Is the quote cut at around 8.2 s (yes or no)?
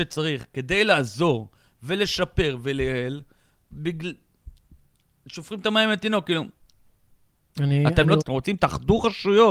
yes